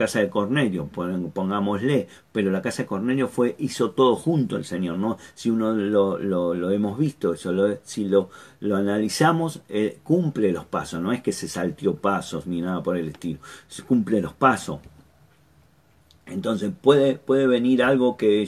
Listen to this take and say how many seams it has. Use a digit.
0